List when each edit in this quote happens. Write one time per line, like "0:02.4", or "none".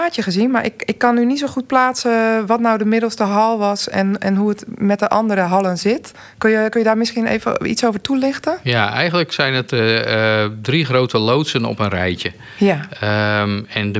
none